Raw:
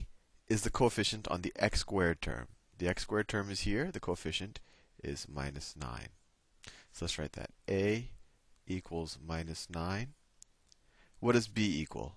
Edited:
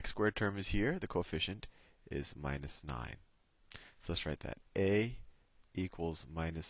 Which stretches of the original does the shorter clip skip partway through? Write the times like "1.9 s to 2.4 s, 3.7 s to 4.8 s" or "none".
none